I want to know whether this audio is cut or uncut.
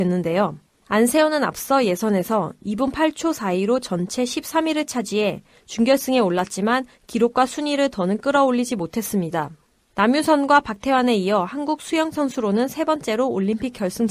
uncut